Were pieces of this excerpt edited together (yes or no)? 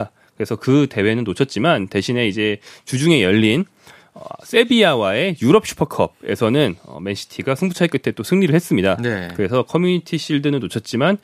no